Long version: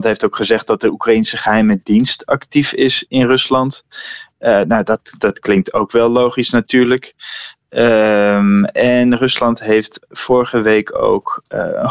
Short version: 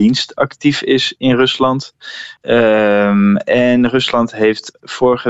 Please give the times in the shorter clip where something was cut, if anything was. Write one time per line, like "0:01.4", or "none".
0:02.4